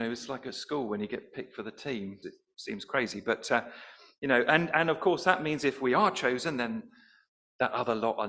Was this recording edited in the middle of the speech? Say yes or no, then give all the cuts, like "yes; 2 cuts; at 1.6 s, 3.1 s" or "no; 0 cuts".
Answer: yes; 1 cut; at 2.2 s